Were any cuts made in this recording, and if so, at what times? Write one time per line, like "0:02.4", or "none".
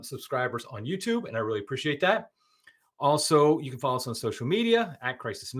none